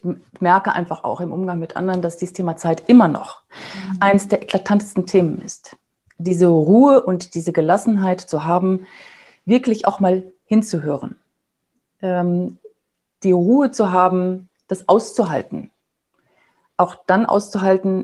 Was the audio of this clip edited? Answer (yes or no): no